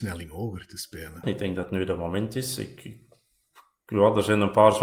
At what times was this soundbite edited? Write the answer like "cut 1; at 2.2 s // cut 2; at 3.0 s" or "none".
cut 1; at 1.2 s

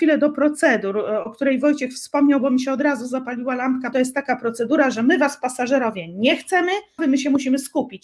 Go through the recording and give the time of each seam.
cut 1; at 3.9 s // cut 2; at 7.0 s

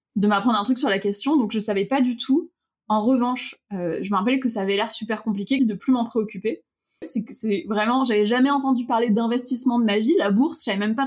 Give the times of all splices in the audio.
cut 1; at 5.6 s // cut 2; at 7.0 s

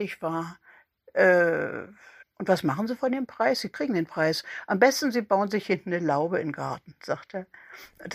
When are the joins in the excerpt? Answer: cut 1; at 2.2 s

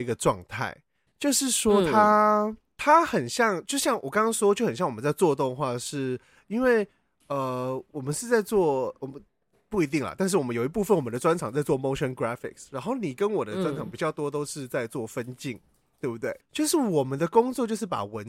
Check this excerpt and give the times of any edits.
cut 1; at 16.4 s

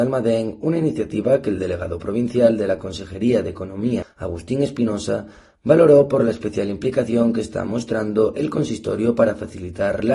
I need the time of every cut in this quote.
cut 1; at 4.0 s

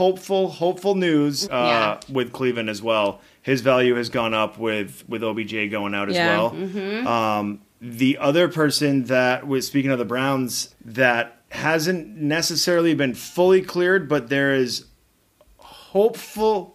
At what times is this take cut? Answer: cut 1; at 1.5 s // cut 2; at 10.7 s

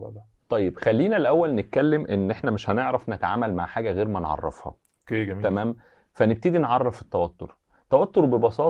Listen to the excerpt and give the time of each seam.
none

